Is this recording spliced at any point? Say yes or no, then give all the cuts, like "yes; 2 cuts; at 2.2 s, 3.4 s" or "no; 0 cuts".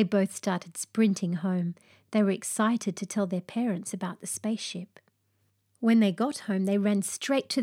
no; 0 cuts